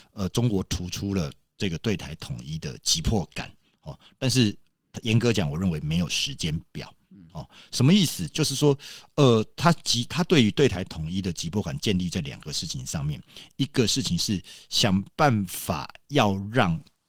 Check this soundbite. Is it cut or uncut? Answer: uncut